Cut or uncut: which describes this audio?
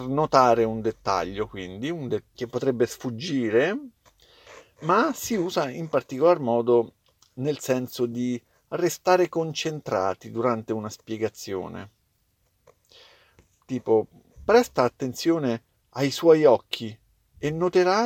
cut